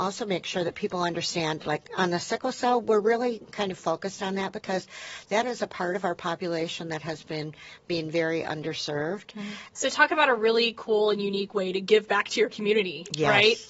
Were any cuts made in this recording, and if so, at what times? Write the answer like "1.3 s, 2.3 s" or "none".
9.7 s

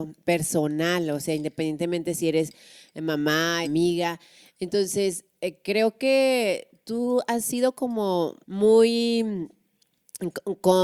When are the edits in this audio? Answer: 3.6 s, 8.4 s

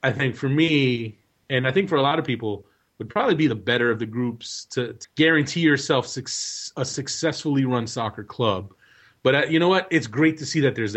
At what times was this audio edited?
5.0 s

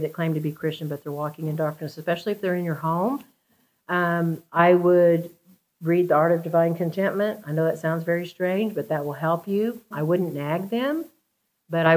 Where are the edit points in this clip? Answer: 9.9 s

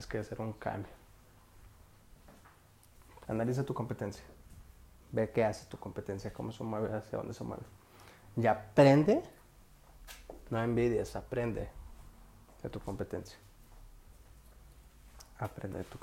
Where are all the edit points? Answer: 3.2 s

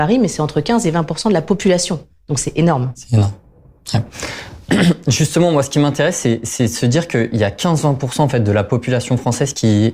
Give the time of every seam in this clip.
none

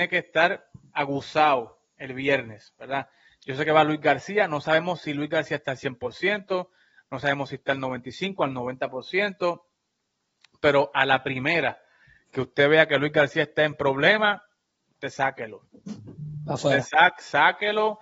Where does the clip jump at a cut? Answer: none

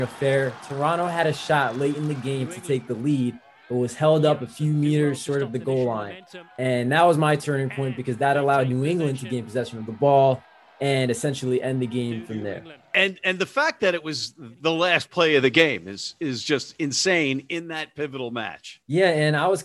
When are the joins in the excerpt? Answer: none

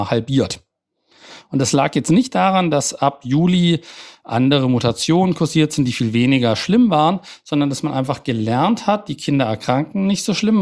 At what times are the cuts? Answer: none

